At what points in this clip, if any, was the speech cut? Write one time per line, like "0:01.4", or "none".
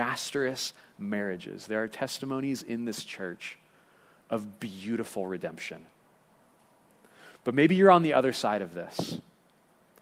0:04.6